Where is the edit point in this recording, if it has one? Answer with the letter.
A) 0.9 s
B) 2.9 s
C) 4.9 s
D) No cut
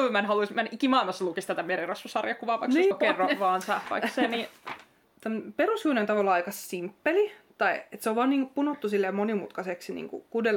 B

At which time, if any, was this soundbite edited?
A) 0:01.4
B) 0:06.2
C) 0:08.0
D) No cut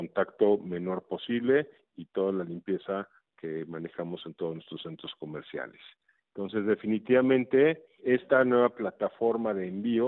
C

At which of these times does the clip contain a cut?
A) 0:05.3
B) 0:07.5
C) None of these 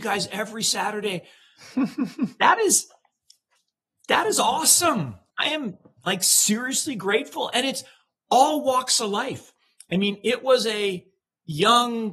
A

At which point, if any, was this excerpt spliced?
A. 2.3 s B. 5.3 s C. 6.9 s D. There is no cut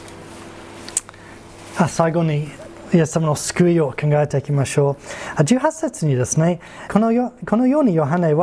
C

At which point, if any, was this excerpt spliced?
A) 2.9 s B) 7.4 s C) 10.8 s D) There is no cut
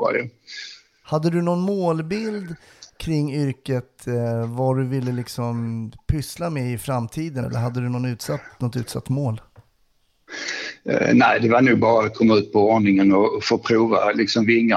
B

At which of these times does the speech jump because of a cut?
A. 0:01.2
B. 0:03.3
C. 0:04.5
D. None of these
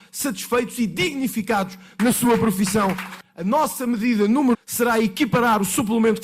C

